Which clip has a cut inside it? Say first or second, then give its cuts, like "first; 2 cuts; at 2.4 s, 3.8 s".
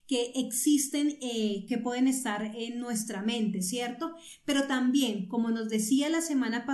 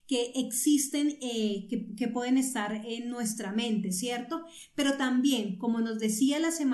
first; 1 cut; at 1.7 s